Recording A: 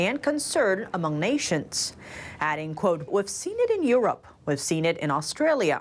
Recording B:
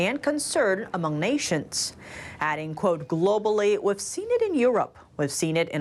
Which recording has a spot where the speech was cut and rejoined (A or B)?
A